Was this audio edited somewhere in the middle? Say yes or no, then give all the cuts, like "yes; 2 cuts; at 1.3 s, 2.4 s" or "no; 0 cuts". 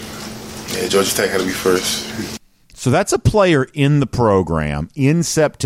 no; 0 cuts